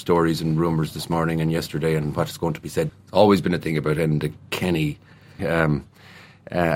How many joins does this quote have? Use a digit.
2